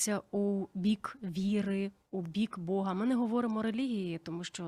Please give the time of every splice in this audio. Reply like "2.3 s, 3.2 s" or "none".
none